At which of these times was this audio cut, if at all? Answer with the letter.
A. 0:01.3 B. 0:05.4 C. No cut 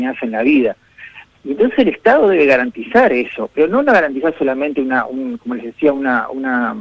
A